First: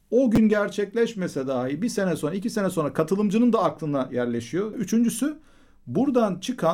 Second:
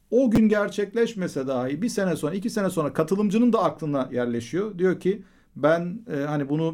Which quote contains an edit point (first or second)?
first